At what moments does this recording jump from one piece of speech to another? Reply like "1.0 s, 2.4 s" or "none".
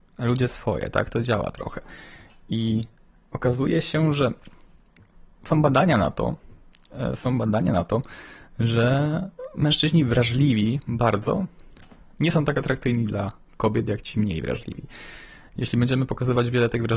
none